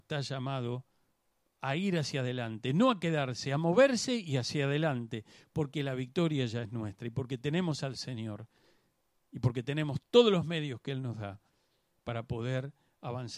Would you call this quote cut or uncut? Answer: uncut